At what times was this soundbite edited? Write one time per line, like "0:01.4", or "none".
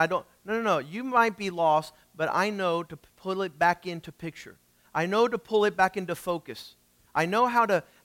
none

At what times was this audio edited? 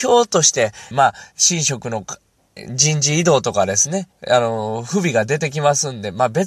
0:00.9

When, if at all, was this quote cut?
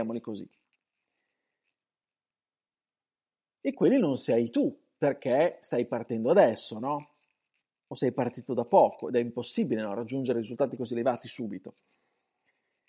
none

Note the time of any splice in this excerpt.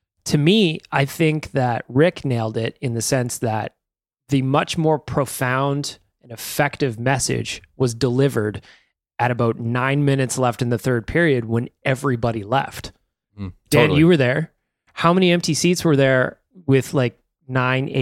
none

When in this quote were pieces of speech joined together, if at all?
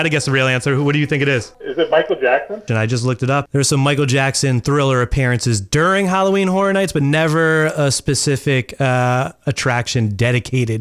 0:02.7

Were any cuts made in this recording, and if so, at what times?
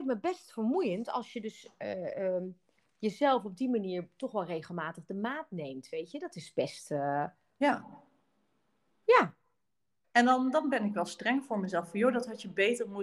0:10.0

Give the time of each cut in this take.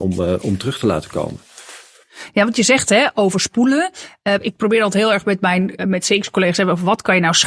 0:05.8

